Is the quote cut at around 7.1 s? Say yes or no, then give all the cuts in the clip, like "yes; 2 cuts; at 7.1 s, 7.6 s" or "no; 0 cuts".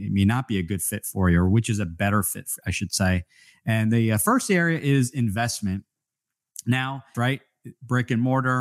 yes; 1 cut; at 7.1 s